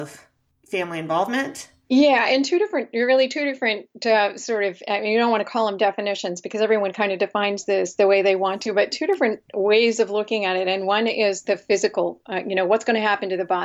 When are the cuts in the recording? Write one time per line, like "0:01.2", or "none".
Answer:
0:11.4